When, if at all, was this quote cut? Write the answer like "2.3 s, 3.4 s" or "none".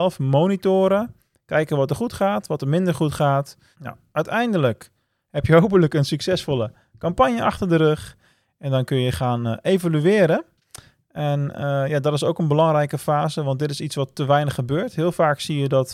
3.7 s